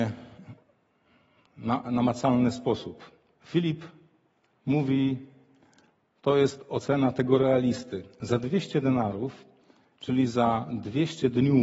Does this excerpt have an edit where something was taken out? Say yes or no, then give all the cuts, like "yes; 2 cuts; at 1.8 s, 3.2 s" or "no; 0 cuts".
no; 0 cuts